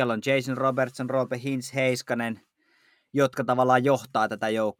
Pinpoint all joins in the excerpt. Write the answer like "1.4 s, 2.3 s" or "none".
none